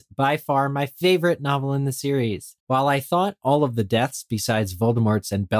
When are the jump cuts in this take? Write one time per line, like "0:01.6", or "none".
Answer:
0:02.6